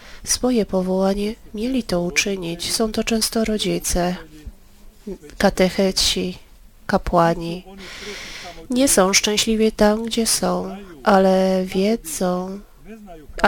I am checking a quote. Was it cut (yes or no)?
no